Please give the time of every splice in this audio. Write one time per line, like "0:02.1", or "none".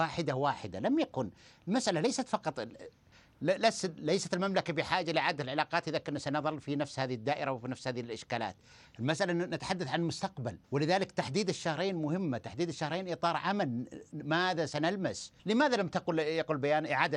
0:10.6
0:15.4